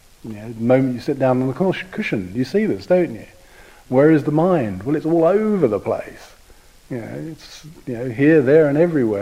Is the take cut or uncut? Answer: uncut